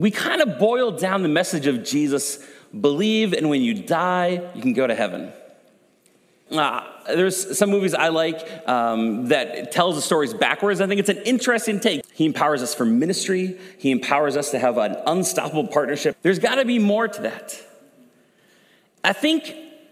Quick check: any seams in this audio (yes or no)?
yes